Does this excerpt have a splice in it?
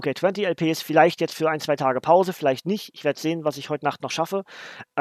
no; 0 cuts

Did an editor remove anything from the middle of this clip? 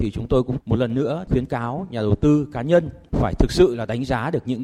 no; 0 cuts

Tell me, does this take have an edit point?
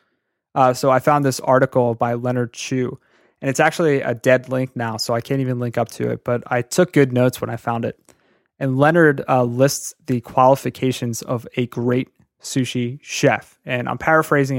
no; 0 cuts

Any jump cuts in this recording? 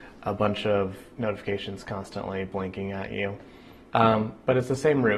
yes; 1 cut; at 3.9 s

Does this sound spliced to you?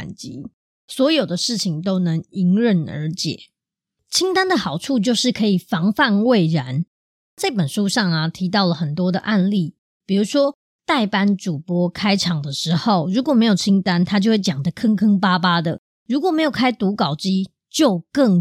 no; 0 cuts

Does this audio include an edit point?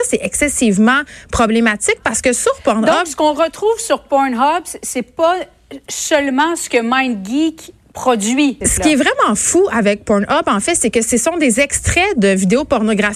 yes; 1 cut; at 8.6 s

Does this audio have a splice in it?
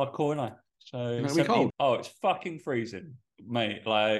yes; 1 cut; at 1.7 s

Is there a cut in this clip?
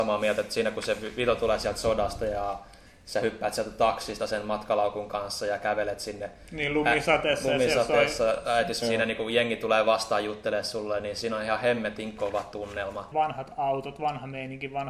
yes; 2 cuts; at 8.8 s, 13.1 s

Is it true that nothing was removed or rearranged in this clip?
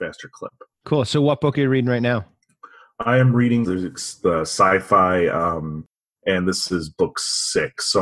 no; 2 cuts; at 3.6 s, 6.2 s

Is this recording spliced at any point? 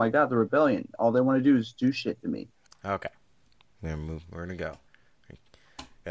yes; 1 cut; at 2.7 s

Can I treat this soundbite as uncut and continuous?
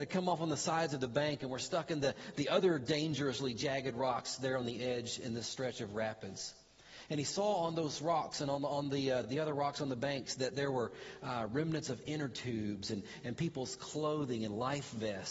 yes; 0 cuts

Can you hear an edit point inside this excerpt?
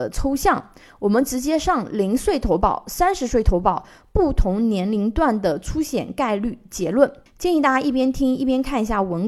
no; 0 cuts

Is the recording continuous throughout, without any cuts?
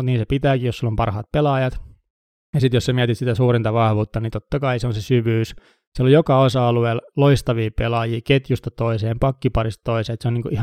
yes; 0 cuts

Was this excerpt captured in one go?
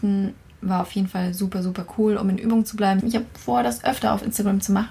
no; 1 cut; at 3.0 s

